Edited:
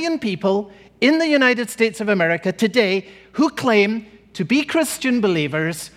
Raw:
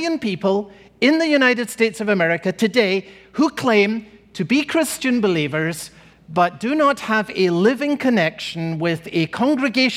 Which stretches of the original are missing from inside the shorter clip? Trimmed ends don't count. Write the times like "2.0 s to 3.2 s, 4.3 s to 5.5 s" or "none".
none